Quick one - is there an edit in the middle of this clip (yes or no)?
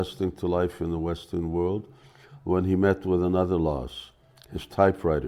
no